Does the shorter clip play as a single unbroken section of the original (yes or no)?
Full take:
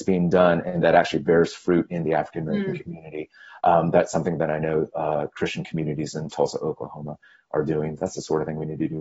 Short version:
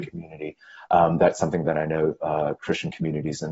yes